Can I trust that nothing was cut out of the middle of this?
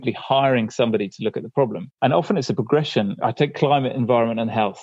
no; 1 cut; at 1.9 s

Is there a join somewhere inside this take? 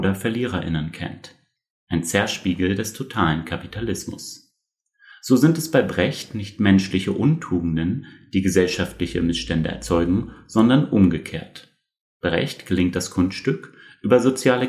no; 0 cuts

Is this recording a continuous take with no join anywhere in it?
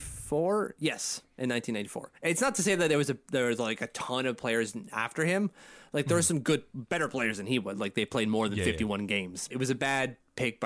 no; 1 cut; at 9.5 s

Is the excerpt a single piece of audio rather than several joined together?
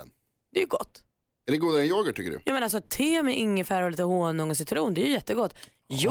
yes; 0 cuts

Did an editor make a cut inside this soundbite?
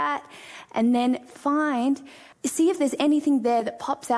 yes; 1 cut; at 2.3 s

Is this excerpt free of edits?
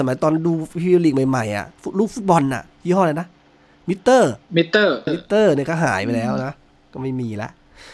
no; 1 cut; at 5.1 s

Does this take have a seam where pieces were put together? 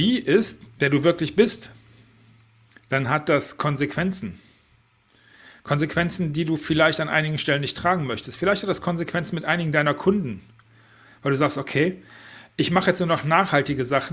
no; 0 cuts

